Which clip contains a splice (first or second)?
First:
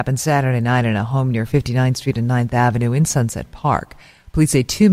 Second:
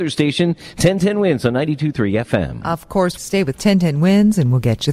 second